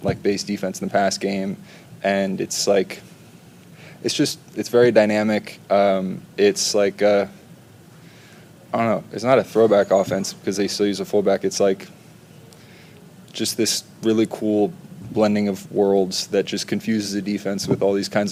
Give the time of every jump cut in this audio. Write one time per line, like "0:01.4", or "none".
none